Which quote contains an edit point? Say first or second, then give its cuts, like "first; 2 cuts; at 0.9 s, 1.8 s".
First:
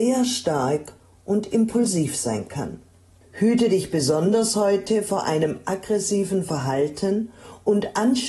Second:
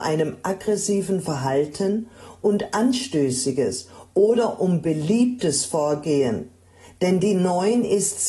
first; 1 cut; at 3.2 s